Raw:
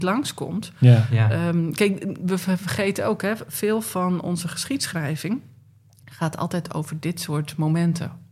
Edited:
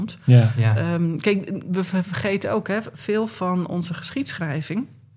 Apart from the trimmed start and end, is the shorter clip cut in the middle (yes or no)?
no